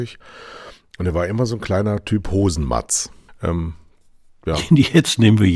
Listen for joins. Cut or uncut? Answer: cut